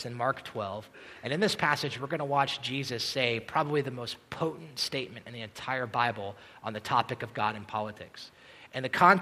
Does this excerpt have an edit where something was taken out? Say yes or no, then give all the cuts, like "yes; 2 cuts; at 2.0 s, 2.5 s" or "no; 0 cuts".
no; 0 cuts